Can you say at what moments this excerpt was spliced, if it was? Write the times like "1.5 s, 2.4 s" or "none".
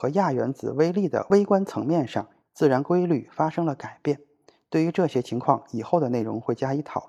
2.4 s